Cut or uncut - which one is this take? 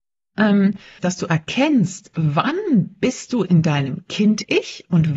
cut